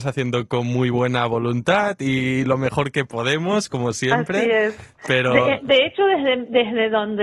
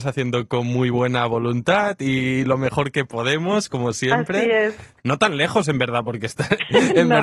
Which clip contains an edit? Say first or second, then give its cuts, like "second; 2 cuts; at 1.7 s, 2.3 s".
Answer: second; 1 cut; at 5.0 s